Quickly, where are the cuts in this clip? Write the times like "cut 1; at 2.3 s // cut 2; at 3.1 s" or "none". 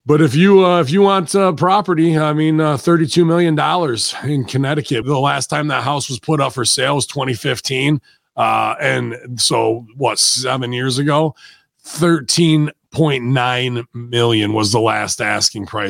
cut 1; at 5.0 s